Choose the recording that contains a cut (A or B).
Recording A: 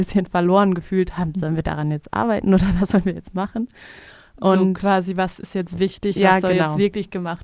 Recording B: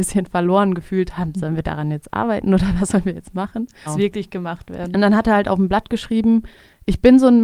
B